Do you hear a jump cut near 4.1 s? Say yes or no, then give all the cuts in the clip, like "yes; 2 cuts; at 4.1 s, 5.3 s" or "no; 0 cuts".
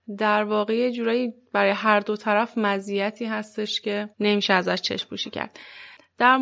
yes; 1 cut; at 4.1 s